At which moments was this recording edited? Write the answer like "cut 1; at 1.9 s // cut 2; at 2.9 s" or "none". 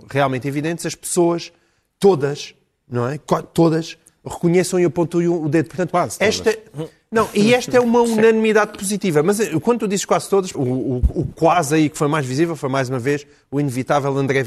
cut 1; at 10.5 s